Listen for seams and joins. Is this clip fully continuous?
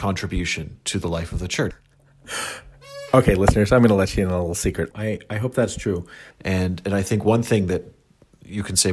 no; 3 cuts; at 1.7 s, 4.9 s, 6.3 s

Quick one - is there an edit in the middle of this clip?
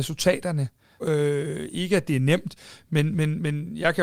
yes; 1 cut; at 1.0 s

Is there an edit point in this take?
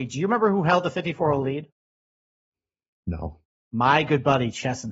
no; 0 cuts

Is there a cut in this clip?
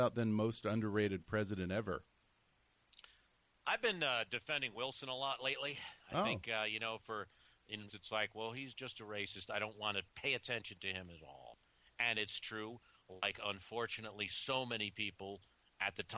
yes; 1 cut; at 7.9 s

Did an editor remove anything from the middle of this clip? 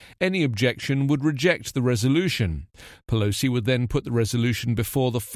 no; 0 cuts

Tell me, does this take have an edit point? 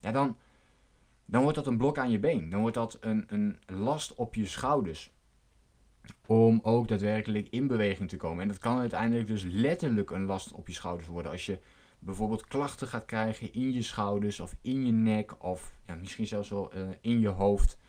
no; 0 cuts

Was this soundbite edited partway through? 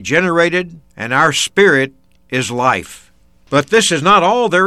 yes; 1 cut; at 0.9 s

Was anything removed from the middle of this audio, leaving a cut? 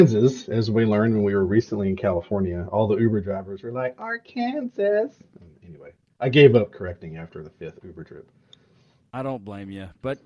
no; 0 cuts

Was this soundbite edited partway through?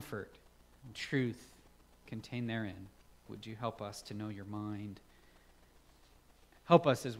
yes; 1 cut; at 3.3 s

